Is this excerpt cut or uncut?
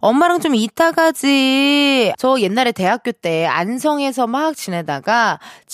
cut